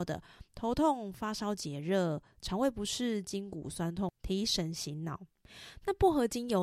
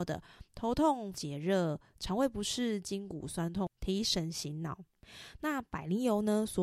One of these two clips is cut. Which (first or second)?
second